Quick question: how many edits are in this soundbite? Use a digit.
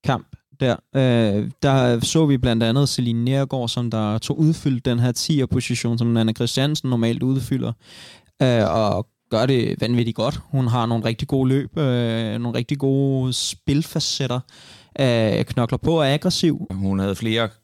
1